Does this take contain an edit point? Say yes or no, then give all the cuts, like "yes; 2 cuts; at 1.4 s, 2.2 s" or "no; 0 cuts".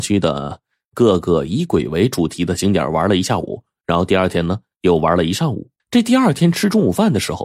yes; 1 cut; at 5.8 s